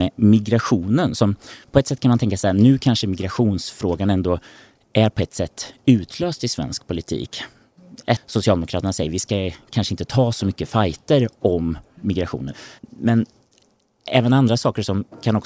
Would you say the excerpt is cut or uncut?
cut